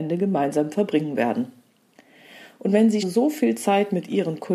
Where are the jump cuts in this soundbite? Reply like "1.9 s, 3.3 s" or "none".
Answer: 3.0 s